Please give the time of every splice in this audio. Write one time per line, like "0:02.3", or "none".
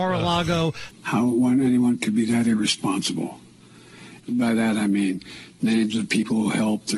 0:00.9
0:04.2